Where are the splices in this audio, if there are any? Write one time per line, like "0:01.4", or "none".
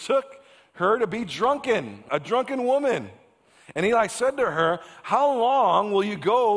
0:02.1